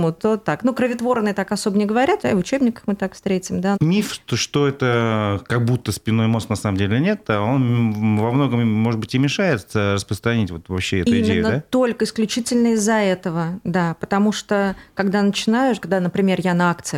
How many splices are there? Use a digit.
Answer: 2